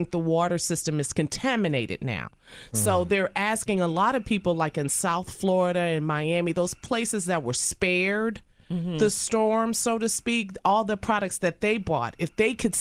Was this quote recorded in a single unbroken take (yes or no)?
yes